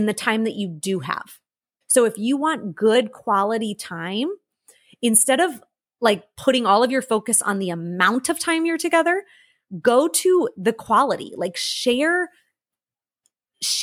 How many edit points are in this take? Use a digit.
1